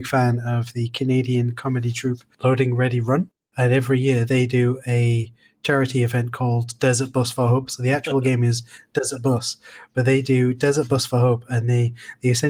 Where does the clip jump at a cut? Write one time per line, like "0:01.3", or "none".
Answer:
none